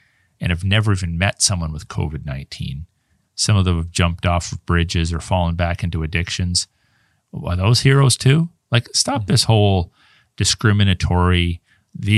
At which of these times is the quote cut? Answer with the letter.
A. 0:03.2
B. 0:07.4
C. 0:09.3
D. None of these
A